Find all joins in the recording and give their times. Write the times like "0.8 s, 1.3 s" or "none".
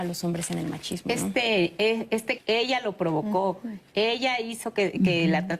2.4 s